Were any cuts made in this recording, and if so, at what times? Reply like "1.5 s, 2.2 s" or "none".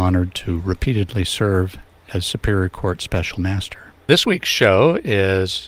none